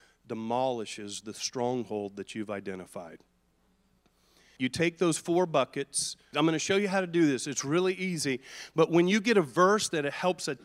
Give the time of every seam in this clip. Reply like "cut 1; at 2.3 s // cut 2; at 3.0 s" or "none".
cut 1; at 4.6 s // cut 2; at 6.3 s